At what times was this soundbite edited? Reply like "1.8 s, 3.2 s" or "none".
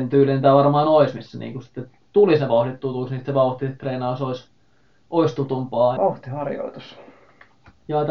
6.0 s